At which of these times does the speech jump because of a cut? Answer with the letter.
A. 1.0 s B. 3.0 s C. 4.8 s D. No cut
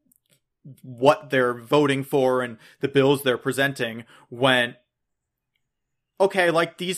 D